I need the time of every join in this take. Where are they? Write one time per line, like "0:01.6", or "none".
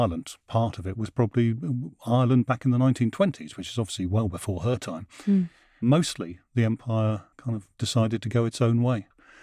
0:07.3

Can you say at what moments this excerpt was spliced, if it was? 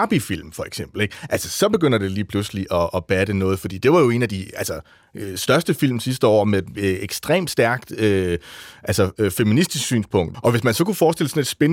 0:10.3

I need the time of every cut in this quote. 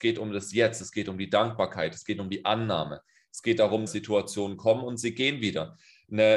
0:03.9

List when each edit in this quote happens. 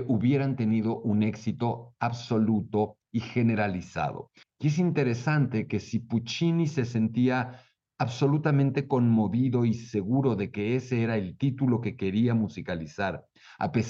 0:04.4

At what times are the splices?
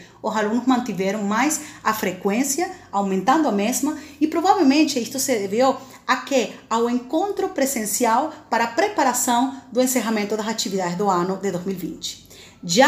none

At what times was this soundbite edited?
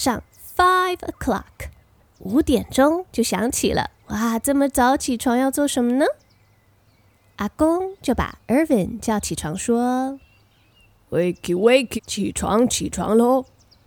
0:04.0
0:12.0

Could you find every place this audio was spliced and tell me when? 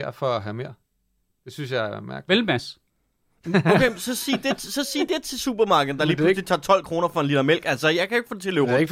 none

